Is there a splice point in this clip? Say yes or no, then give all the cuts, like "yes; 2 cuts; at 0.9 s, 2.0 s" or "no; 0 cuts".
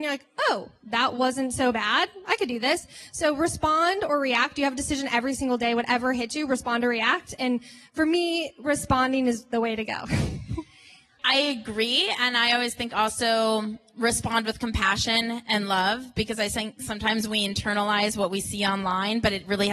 yes; 2 cuts; at 11.2 s, 12.9 s